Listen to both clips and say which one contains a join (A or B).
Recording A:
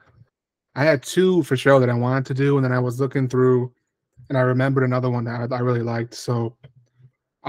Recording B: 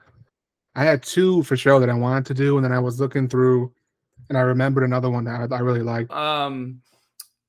B